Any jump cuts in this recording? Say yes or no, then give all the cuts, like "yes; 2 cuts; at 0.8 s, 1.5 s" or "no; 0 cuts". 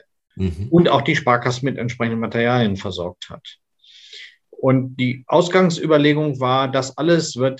no; 0 cuts